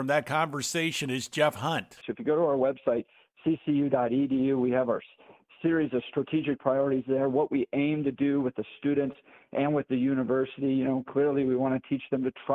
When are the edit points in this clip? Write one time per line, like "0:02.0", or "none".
0:02.0